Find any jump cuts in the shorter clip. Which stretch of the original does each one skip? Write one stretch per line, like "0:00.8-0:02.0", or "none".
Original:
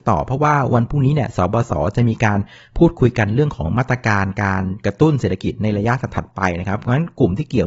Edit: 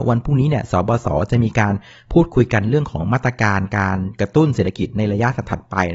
none